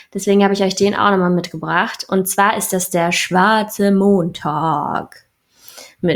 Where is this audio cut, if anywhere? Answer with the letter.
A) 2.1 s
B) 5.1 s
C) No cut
C